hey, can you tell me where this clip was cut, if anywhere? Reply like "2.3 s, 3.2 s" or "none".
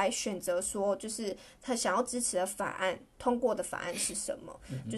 none